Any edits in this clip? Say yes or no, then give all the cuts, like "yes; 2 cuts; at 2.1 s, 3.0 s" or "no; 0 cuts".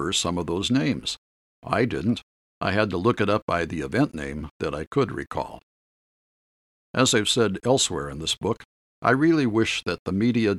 no; 0 cuts